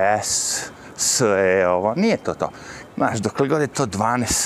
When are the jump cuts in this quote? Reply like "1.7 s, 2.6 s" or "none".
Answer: 2.9 s